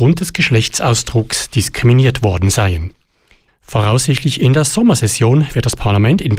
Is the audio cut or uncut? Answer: cut